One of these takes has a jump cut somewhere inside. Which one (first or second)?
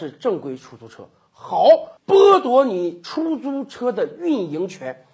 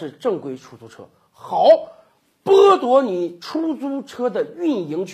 first